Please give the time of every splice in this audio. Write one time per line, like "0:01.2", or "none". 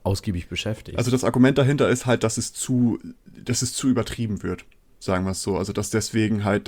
none